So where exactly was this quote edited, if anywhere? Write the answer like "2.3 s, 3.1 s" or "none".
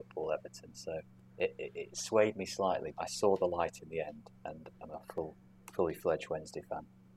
2.9 s, 4.7 s